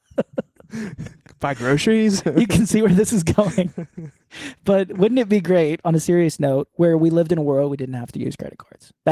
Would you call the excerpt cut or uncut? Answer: uncut